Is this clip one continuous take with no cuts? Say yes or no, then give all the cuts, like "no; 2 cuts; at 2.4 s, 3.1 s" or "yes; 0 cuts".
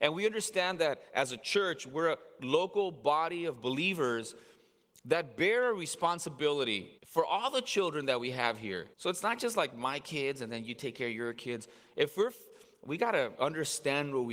no; 3 cuts; at 7.0 s, 8.9 s, 13.3 s